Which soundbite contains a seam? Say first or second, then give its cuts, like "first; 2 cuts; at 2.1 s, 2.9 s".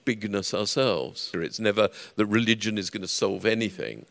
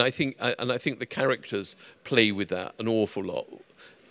first; 1 cut; at 1.3 s